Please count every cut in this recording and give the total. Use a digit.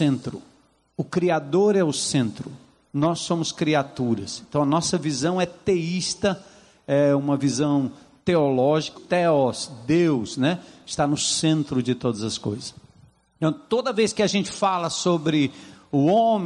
1